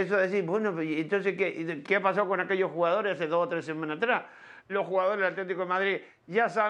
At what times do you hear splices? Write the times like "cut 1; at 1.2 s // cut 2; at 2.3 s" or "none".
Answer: cut 1; at 1.8 s // cut 2; at 4.6 s

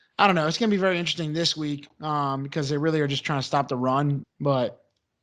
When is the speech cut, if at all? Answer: cut 1; at 4.2 s

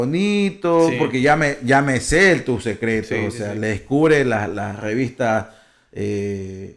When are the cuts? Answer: none

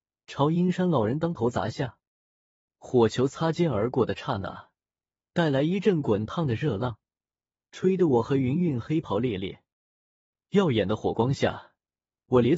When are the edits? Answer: none

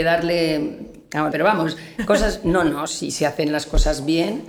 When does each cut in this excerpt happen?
cut 1; at 1.3 s

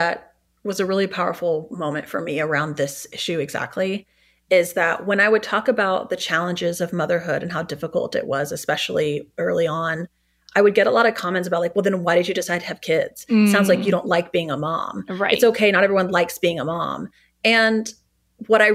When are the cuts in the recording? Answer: none

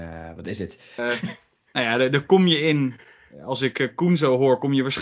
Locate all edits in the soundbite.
cut 1; at 1.0 s

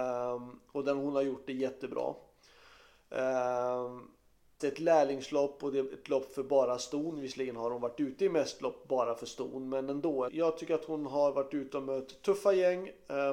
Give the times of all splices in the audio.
cut 1; at 4.6 s // cut 2; at 10.3 s

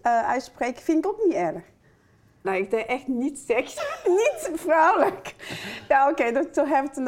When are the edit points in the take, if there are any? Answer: cut 1; at 2.4 s // cut 2; at 3.8 s

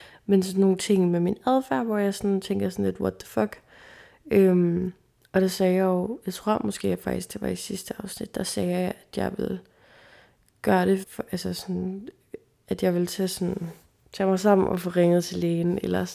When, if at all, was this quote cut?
cut 1; at 11.0 s

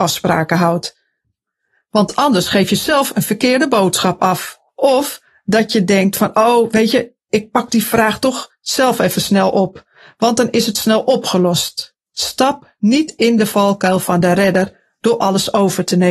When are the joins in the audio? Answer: cut 1; at 4.7 s // cut 2; at 12.1 s

